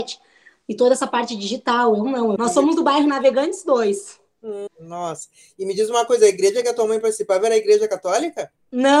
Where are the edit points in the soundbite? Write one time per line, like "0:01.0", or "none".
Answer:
0:02.4
0:04.7